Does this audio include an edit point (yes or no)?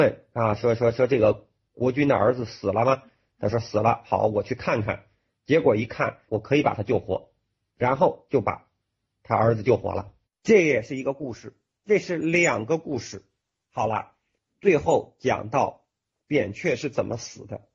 yes